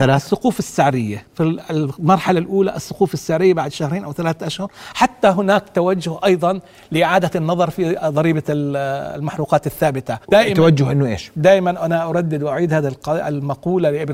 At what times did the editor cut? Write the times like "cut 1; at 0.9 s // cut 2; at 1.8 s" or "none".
cut 1; at 1.3 s // cut 2; at 10.2 s

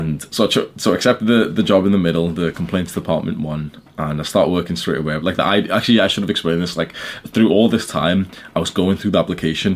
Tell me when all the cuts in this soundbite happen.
cut 1; at 5.2 s

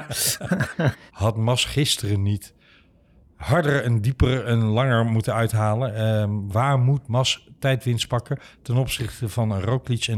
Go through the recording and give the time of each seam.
cut 1; at 1.1 s // cut 2; at 6.5 s

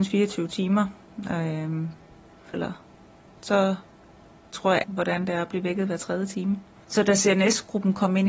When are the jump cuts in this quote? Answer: cut 1; at 2.5 s // cut 2; at 4.8 s

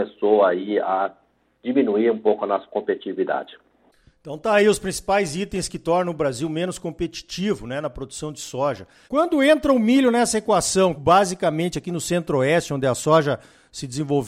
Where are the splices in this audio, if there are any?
cut 1; at 9.0 s // cut 2; at 11.0 s

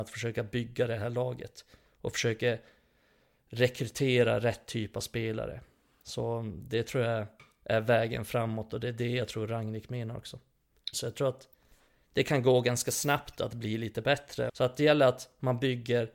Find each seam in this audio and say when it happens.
cut 1; at 10.9 s // cut 2; at 14.5 s

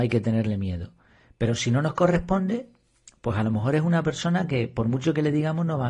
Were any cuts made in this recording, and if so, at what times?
none

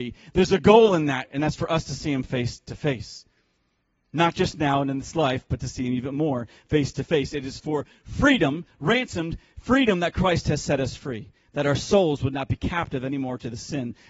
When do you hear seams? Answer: none

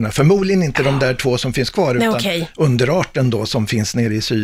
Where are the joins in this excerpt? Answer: cut 1; at 2.5 s

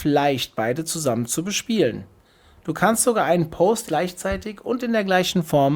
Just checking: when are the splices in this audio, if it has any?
cut 1; at 3.9 s

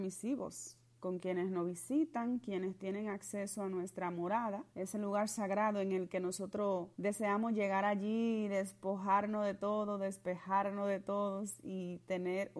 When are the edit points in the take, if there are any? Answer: cut 1; at 4.7 s // cut 2; at 6.9 s

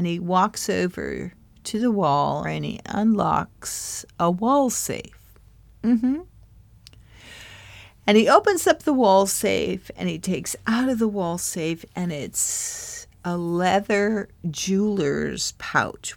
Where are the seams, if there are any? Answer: cut 1; at 2.4 s

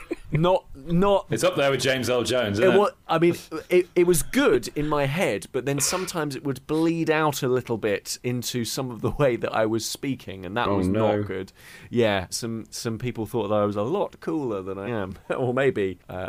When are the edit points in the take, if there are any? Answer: cut 1; at 12.3 s // cut 2; at 14.9 s

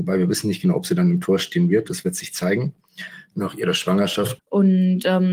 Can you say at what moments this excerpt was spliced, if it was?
cut 1; at 3.3 s // cut 2; at 4.4 s

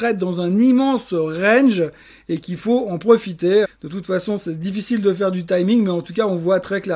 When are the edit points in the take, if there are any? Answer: cut 1; at 3.6 s

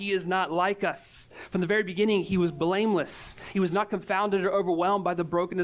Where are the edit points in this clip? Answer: none

